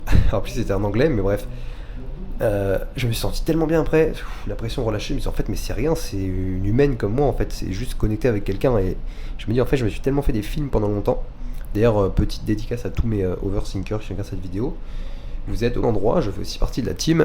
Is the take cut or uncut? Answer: cut